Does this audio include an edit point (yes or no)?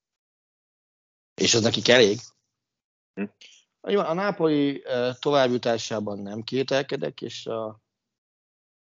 no